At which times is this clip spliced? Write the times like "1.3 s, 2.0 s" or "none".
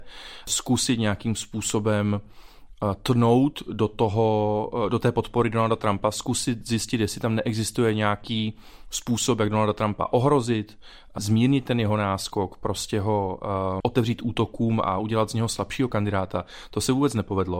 13.8 s